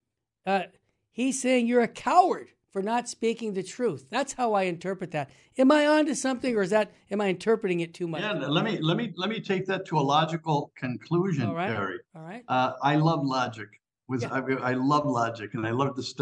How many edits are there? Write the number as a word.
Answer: one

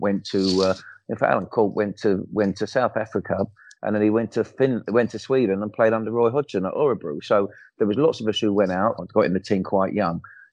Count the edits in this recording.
one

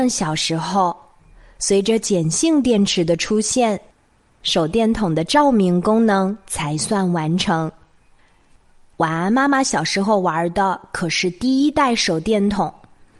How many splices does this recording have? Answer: zero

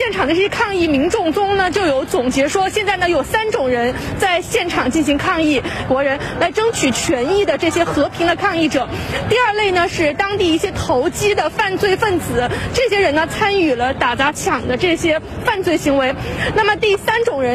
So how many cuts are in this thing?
one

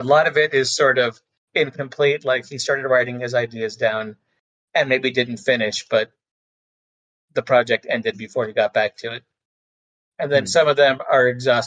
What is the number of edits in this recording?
zero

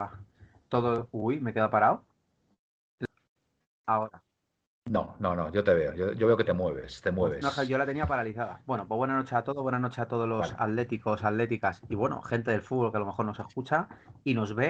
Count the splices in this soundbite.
zero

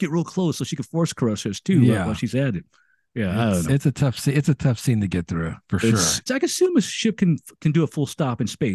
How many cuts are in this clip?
two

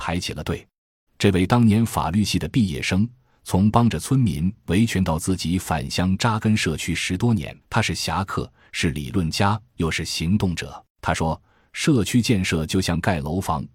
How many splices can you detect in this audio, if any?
three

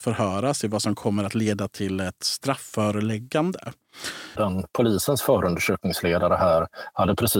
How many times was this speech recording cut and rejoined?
one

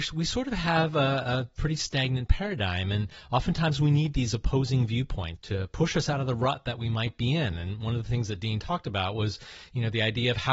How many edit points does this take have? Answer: one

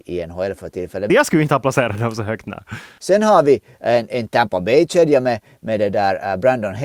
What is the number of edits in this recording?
one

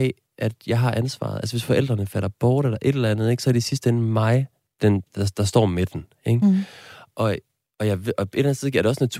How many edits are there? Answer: zero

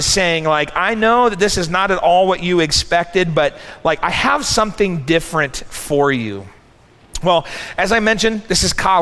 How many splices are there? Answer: zero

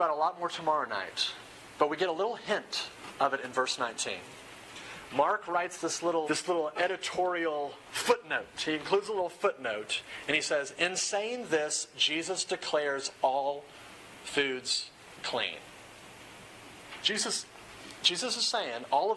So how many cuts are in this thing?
two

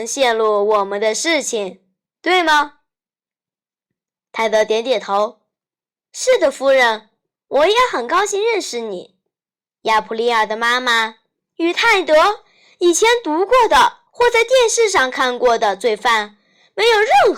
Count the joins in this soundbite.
two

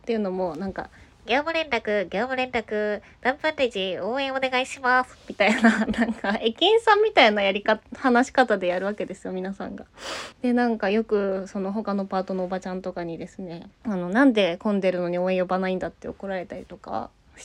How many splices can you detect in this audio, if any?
two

